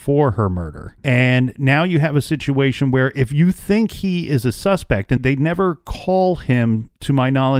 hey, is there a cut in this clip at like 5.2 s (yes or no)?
yes